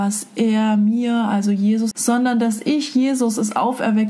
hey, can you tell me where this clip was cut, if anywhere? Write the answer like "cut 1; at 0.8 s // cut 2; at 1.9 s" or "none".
cut 1; at 1.9 s